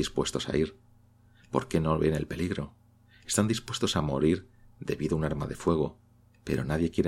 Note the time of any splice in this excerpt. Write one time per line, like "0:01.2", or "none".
none